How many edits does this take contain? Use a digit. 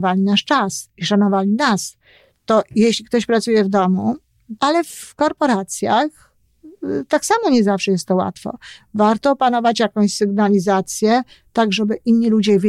1